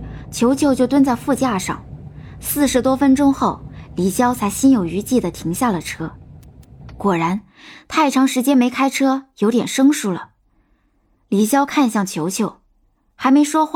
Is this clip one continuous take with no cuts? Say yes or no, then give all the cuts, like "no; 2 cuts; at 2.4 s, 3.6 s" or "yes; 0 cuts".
yes; 0 cuts